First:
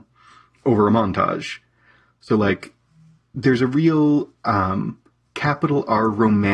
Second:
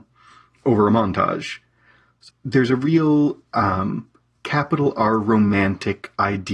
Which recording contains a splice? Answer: second; 1 cut; at 2.3 s

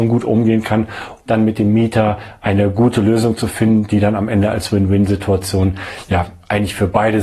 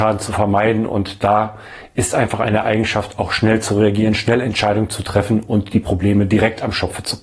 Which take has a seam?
first; 1 cut; at 1.3 s

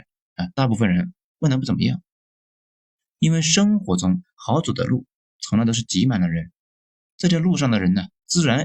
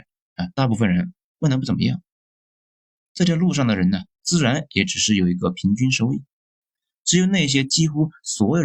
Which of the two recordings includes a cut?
second; 1 cut; at 3.0 s

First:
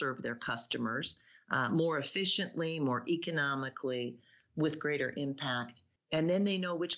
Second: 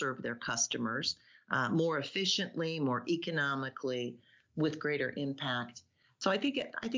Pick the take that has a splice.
first; 1 cut; at 6.0 s

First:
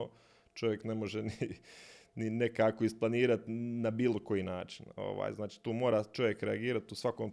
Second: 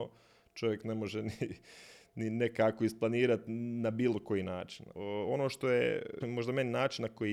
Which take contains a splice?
second; 2 cuts; at 4.9 s, 6.2 s

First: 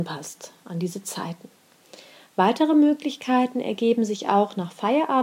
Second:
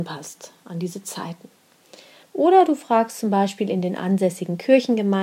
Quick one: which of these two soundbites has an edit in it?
second; 1 cut; at 2.2 s

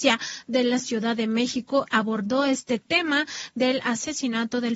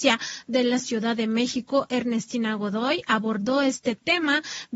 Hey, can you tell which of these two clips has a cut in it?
first; 1 cut; at 1.9 s

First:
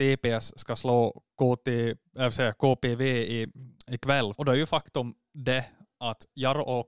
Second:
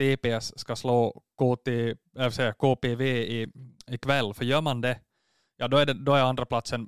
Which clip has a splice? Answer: first; 1 cut; at 4.3 s

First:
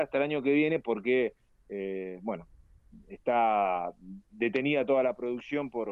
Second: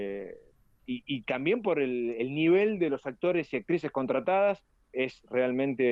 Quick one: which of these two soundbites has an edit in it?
second; 1 cut; at 4.8 s

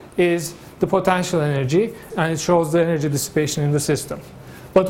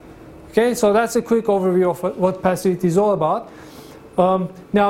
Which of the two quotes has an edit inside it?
first; 1 cut; at 2.1 s

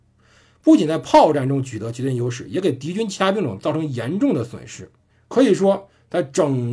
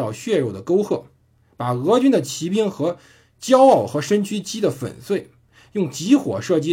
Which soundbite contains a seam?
first; 1 cut; at 5.1 s

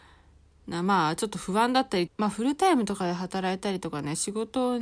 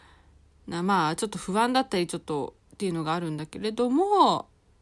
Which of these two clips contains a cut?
first; 1 cut; at 2.1 s

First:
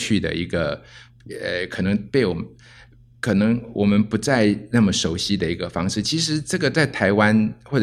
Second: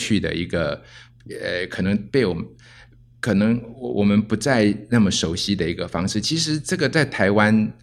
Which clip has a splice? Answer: first; 1 cut; at 3.8 s

